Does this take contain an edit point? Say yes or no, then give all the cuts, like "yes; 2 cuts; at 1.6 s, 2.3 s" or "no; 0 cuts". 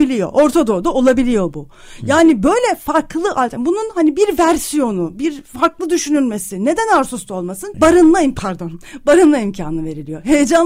yes; 1 cut; at 7.7 s